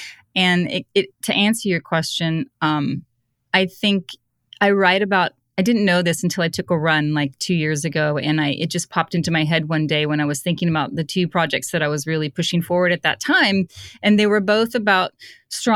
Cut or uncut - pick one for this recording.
cut